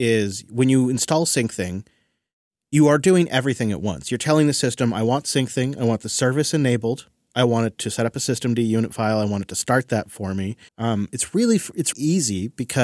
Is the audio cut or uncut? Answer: cut